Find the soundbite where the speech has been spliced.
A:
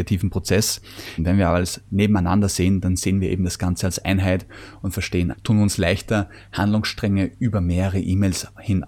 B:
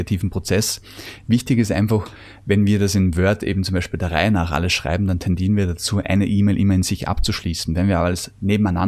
A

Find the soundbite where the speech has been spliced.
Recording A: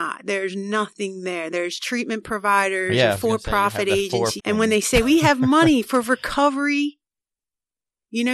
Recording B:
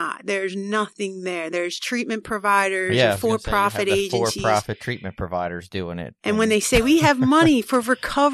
A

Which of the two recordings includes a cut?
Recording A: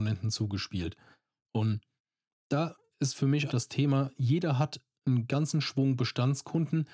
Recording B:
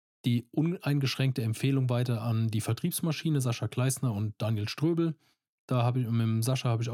A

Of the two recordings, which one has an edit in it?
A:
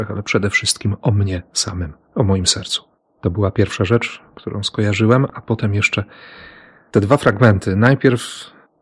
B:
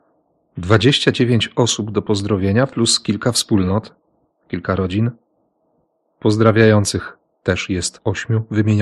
A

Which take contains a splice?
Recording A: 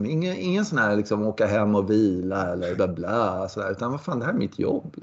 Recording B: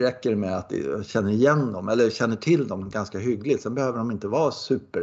A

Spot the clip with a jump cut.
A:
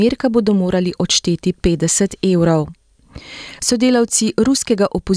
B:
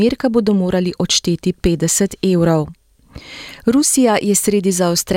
A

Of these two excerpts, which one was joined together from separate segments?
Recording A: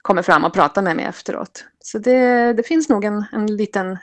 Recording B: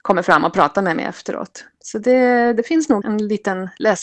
B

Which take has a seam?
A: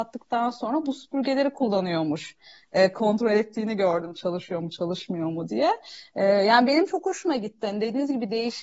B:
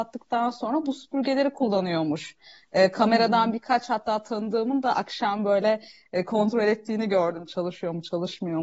A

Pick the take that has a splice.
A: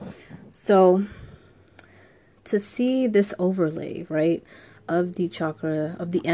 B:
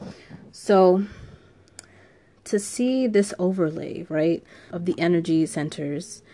B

